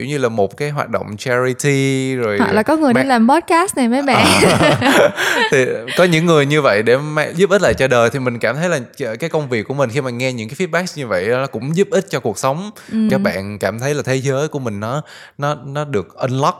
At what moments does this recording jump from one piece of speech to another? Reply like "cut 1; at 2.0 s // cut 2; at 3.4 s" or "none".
cut 1; at 13.1 s